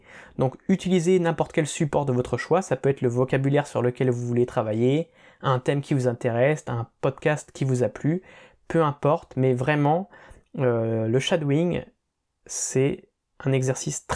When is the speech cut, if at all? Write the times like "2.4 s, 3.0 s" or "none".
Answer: none